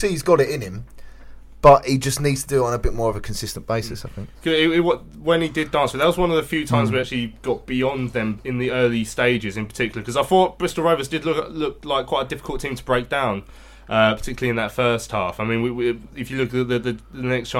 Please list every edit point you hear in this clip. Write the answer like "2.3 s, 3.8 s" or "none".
none